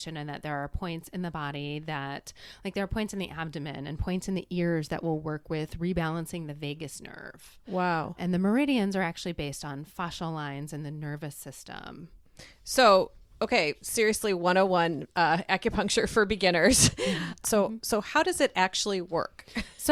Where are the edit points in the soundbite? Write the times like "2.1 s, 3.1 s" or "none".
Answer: 8.2 s, 17.4 s